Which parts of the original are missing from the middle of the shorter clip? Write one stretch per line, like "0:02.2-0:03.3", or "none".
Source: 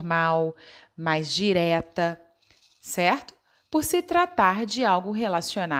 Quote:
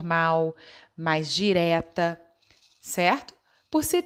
none